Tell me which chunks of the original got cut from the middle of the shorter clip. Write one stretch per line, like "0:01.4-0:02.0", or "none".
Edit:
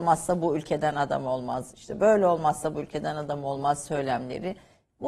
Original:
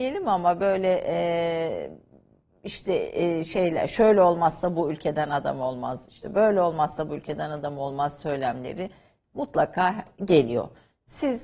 none